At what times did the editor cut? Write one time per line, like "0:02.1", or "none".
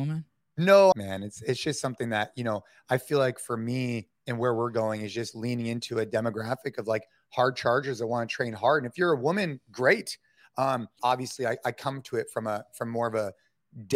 0:00.9
0:11.0